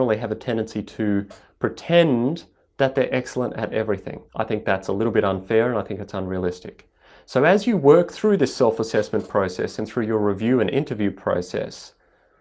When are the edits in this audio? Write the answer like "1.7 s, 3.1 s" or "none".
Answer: 4.3 s